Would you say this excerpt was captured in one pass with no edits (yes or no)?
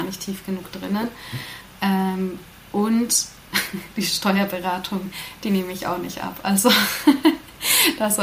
yes